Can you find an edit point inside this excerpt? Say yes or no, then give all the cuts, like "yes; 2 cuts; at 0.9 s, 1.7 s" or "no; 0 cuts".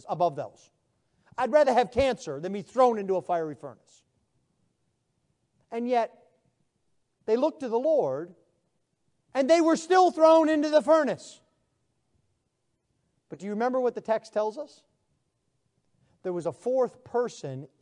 no; 0 cuts